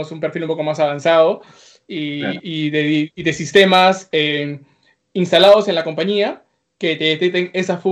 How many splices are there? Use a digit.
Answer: 0